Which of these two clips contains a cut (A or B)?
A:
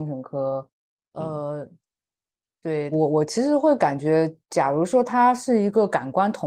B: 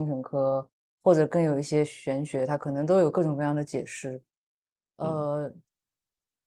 A